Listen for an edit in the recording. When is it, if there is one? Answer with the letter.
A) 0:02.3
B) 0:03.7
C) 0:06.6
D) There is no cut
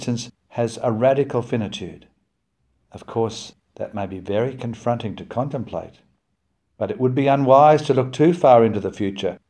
D